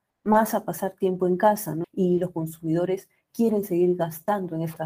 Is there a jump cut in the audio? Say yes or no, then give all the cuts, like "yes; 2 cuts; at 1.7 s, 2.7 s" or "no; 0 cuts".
yes; 1 cut; at 1.8 s